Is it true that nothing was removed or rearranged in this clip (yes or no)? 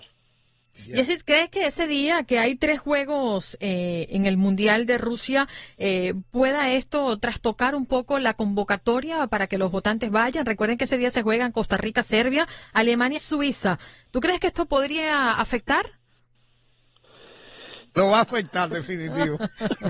no